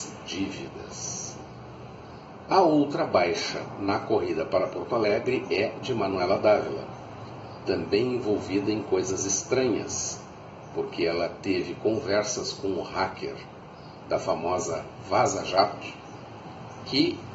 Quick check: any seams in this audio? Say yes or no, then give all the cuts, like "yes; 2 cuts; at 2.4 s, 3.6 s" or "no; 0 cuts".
yes; 1 cut; at 2.5 s